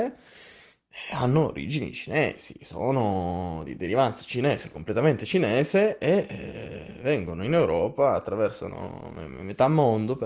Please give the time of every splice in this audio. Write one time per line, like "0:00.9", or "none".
none